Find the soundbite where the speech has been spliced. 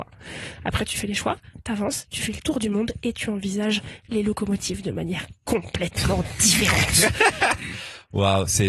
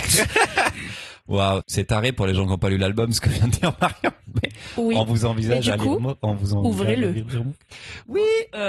second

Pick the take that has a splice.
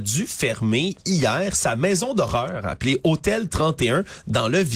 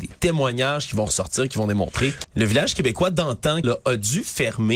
second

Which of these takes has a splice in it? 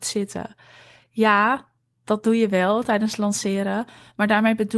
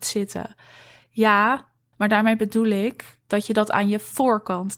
second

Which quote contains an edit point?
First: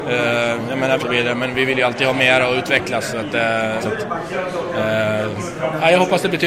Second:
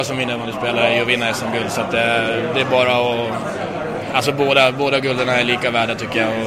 first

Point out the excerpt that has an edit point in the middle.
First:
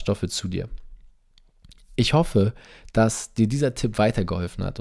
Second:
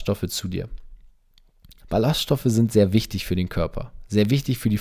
second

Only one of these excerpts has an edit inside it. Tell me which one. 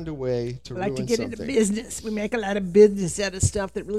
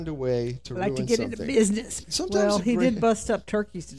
second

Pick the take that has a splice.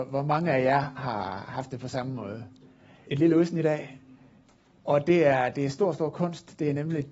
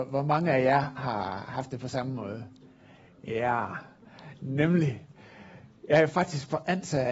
first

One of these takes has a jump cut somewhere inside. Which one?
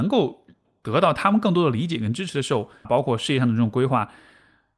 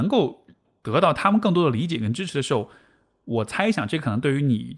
first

